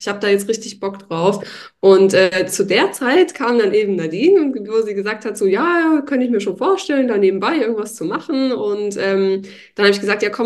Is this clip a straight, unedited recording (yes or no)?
yes